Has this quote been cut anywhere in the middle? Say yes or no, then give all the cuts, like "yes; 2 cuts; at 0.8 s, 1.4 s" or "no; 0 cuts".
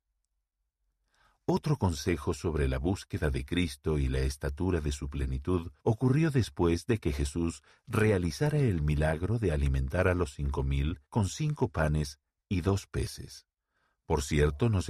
yes; 2 cuts; at 5.8 s, 11.0 s